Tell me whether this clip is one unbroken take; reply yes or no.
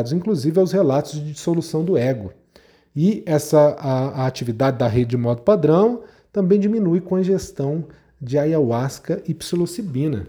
yes